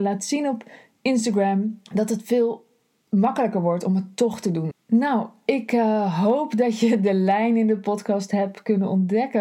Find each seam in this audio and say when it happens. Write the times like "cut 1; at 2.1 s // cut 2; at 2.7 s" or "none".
cut 1; at 1.9 s // cut 2; at 4.7 s